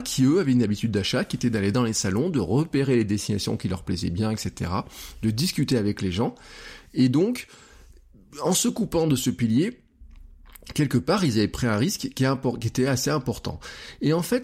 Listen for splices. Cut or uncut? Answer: uncut